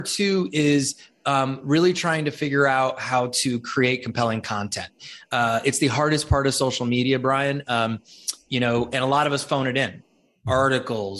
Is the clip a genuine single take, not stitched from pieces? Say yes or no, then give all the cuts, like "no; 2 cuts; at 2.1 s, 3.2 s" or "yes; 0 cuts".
yes; 0 cuts